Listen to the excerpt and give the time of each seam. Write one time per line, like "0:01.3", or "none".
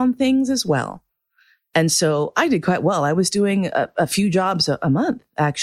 none